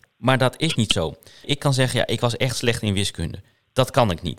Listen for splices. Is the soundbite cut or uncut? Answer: cut